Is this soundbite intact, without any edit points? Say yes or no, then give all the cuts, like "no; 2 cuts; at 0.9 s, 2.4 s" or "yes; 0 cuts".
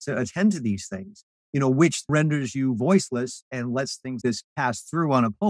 no; 2 cuts; at 2.1 s, 4.2 s